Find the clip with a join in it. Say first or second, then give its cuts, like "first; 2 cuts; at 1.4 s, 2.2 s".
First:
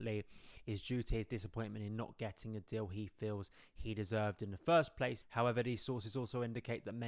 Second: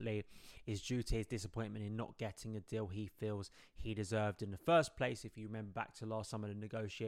first; 1 cut; at 5.2 s